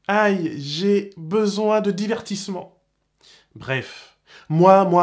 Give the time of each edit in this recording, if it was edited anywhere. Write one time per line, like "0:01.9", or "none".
none

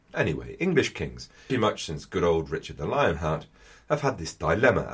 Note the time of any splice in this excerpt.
0:01.5

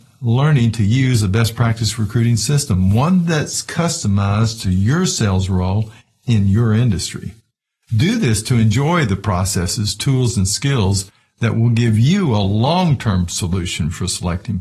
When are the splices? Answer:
none

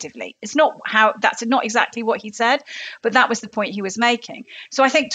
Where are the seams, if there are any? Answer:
none

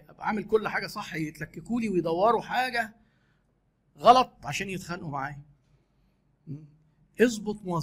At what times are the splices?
none

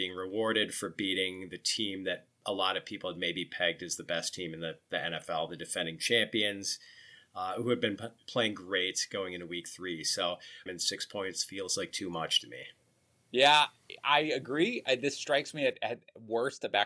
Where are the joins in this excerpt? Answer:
0:10.7

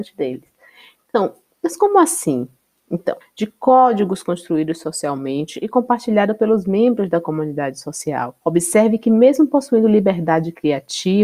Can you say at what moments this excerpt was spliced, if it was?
0:03.2
0:08.4

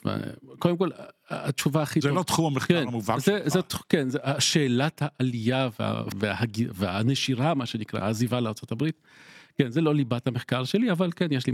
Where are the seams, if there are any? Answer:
0:06.1

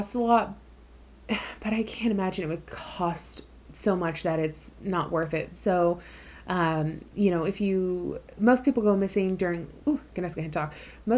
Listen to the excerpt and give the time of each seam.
0:05.6
0:08.3
0:09.8

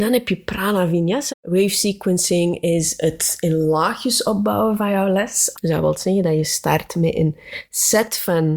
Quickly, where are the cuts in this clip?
0:01.3
0:05.5

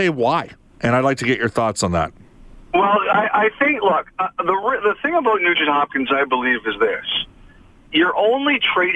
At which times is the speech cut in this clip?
none

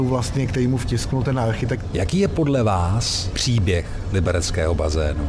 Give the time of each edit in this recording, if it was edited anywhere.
0:01.9

